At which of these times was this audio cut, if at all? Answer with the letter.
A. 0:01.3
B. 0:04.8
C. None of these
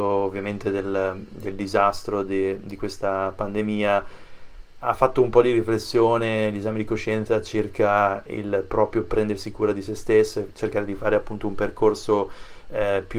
B